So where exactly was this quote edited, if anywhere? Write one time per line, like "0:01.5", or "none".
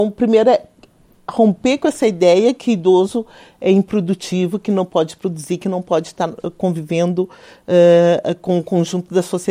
none